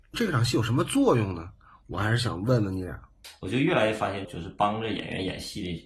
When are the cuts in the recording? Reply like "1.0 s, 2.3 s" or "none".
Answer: 4.2 s

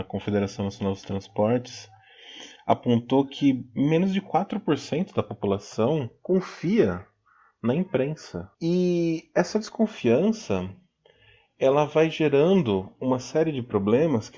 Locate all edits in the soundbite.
8.5 s

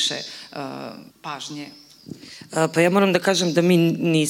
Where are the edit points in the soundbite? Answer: 1.1 s

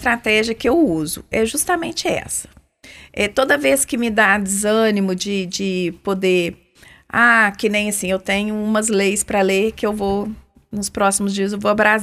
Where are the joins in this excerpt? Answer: none

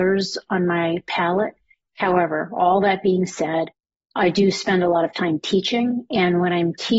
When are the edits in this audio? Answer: none

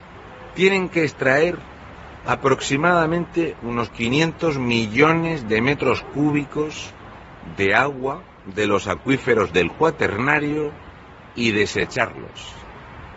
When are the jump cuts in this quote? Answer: 2.2 s, 8.3 s

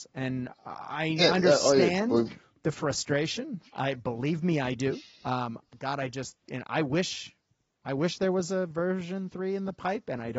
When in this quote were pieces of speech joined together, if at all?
none

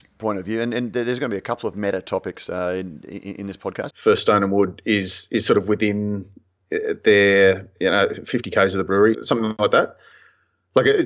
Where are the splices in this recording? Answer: 3.9 s, 9.1 s

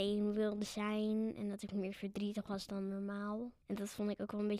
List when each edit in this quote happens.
3.6 s

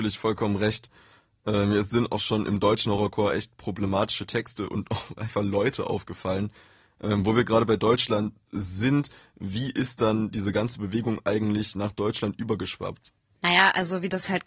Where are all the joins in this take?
none

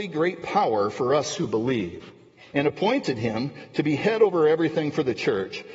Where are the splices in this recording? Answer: 2.5 s

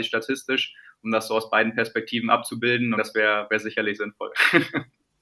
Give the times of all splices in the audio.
3.0 s

